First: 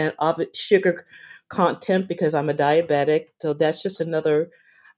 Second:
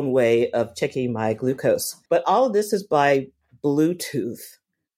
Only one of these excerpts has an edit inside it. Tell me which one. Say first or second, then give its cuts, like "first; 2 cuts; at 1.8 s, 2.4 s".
second; 1 cut; at 2.1 s